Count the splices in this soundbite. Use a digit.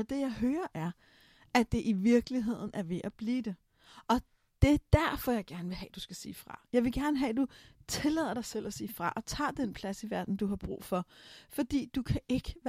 0